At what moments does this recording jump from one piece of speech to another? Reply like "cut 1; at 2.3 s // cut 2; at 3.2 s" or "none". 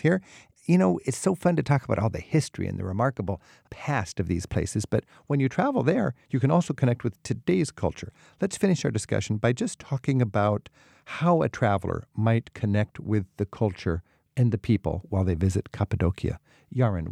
none